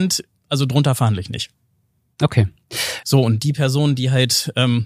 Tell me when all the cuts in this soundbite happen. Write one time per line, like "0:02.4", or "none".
0:03.0